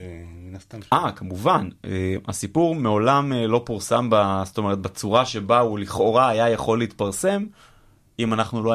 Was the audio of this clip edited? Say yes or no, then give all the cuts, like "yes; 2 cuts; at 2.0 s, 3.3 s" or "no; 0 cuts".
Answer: no; 0 cuts